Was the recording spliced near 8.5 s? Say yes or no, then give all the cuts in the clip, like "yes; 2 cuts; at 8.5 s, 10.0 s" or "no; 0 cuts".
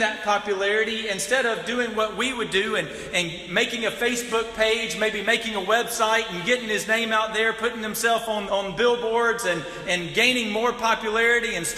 yes; 1 cut; at 8.5 s